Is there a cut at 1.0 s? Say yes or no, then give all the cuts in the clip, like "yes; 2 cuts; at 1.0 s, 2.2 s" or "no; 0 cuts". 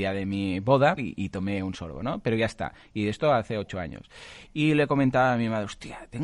yes; 2 cuts; at 1.0 s, 4.5 s